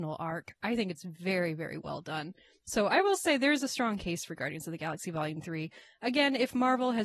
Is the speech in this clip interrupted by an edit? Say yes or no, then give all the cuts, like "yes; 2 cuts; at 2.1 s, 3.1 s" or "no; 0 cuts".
no; 0 cuts